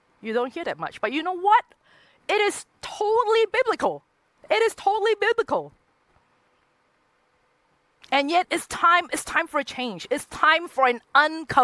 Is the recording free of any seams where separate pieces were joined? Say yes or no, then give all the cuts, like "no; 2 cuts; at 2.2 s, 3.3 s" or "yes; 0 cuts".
no; 1 cut; at 8.4 s